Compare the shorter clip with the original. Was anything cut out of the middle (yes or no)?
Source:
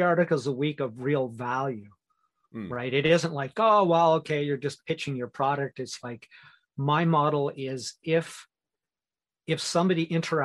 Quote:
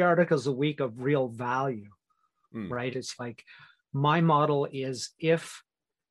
yes